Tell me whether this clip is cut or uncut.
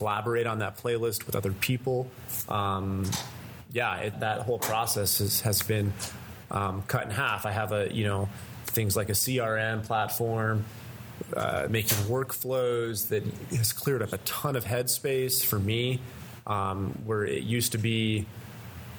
cut